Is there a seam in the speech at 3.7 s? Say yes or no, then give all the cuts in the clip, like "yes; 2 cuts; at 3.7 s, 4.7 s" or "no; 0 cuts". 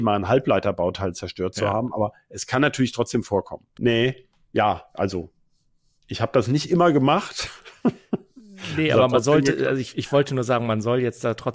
yes; 1 cut; at 3.7 s